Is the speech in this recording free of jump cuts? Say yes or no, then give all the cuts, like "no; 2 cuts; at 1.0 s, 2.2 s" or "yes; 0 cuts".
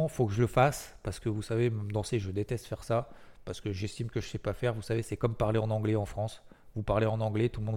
yes; 0 cuts